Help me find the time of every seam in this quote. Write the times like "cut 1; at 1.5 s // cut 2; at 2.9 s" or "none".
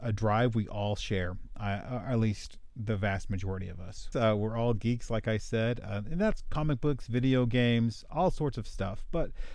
cut 1; at 4.1 s